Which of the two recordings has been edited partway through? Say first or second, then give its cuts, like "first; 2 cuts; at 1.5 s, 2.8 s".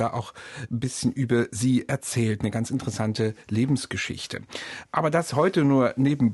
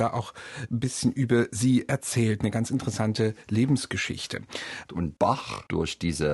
second; 1 cut; at 4.9 s